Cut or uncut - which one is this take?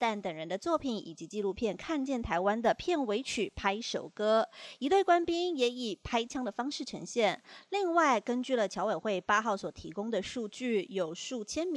cut